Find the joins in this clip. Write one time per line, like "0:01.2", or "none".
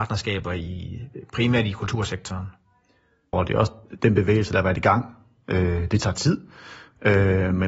0:03.3